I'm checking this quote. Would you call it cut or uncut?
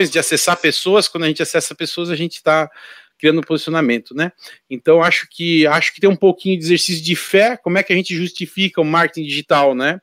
uncut